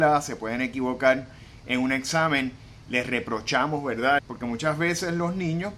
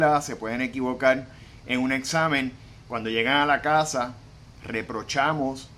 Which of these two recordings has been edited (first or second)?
first